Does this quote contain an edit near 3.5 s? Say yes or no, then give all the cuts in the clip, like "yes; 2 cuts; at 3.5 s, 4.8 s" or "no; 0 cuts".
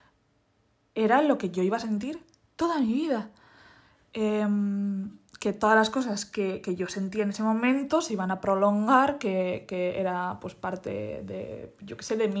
no; 0 cuts